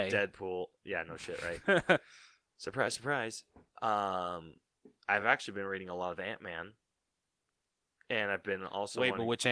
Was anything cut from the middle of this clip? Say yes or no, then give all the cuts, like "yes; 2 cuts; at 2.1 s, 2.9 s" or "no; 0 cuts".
no; 0 cuts